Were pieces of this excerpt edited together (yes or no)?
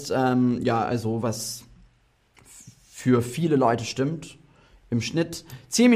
no